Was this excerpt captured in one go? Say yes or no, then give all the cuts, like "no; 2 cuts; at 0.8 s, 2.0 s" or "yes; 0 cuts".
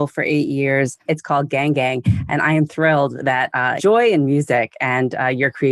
no; 2 cuts; at 1.1 s, 3.8 s